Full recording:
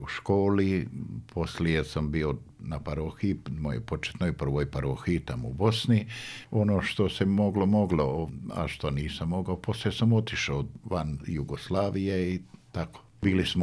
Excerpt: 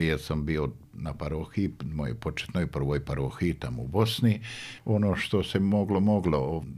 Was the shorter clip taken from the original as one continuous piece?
yes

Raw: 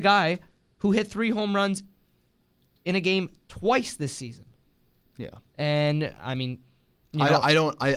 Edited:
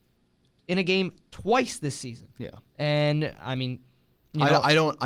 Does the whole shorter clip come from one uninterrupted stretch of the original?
no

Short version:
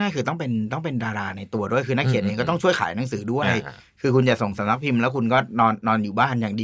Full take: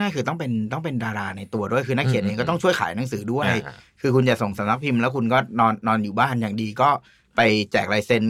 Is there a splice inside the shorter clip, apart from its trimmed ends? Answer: no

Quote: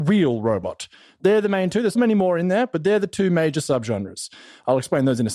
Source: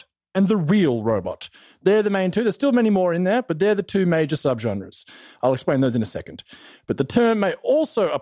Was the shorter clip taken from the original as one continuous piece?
no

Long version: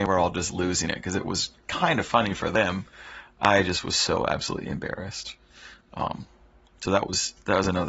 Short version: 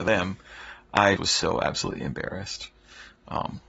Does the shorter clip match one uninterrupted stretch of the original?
no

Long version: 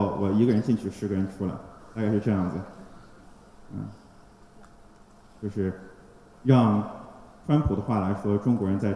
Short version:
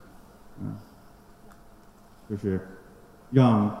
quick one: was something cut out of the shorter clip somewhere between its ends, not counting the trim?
no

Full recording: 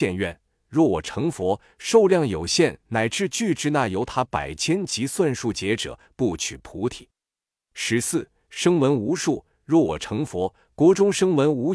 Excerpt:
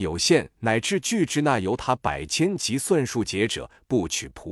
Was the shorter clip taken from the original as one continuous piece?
yes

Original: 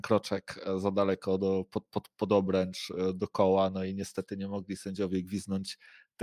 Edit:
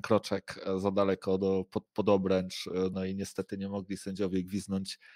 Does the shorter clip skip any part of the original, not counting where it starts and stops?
yes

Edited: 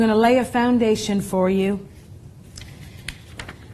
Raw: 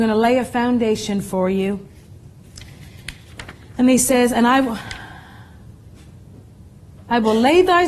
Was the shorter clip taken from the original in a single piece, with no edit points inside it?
yes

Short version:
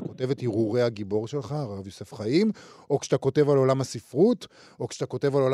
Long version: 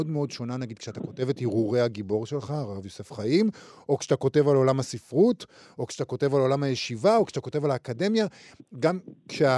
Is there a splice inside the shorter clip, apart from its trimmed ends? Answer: no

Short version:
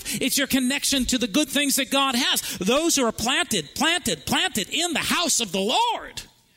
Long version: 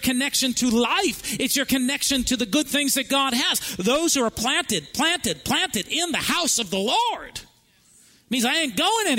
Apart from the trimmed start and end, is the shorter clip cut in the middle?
no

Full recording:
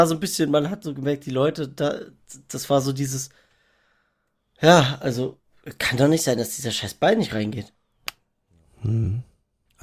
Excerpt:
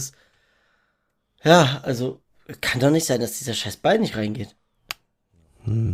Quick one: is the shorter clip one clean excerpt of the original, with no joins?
yes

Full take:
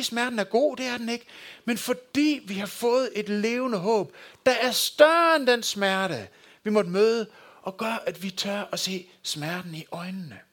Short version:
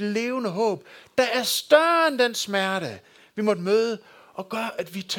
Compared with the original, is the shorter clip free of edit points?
yes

